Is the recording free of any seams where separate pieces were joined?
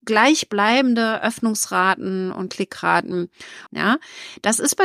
no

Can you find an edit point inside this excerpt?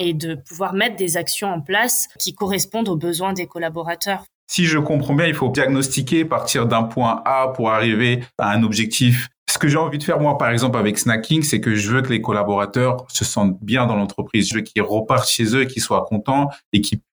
yes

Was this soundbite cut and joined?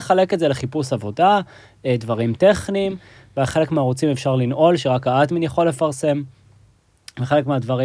no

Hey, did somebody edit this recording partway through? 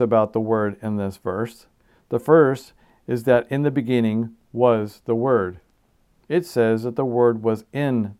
yes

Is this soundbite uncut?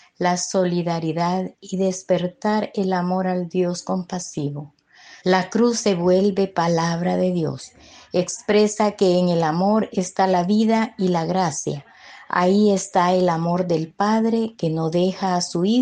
no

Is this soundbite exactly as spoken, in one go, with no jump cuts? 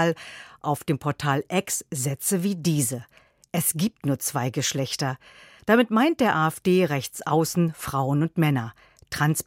yes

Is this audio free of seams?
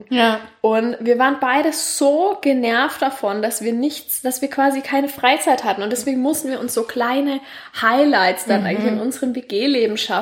yes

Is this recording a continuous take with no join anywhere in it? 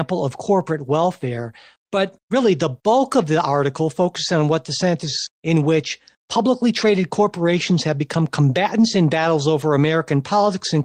no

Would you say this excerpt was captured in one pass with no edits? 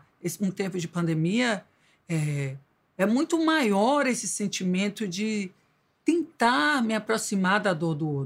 yes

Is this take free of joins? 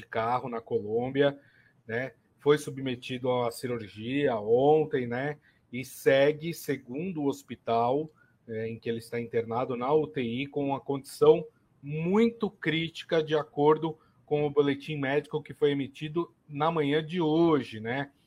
yes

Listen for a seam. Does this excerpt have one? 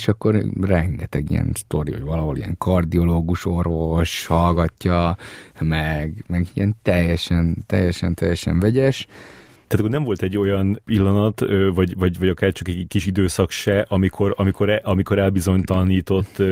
no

